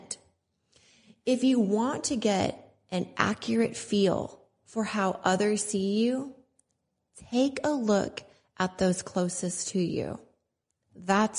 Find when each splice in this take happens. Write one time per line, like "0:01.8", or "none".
none